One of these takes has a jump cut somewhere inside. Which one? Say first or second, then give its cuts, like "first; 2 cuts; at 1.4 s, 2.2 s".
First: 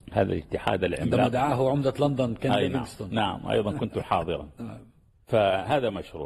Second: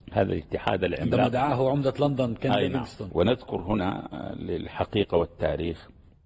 second; 1 cut; at 3.1 s